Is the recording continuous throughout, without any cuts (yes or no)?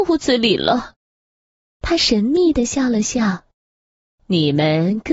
no